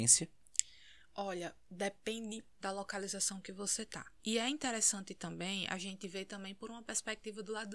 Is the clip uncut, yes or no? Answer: no